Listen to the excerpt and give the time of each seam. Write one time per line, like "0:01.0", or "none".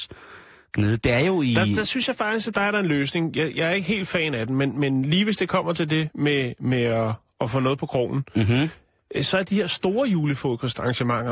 none

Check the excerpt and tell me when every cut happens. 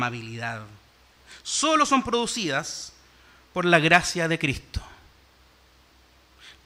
none

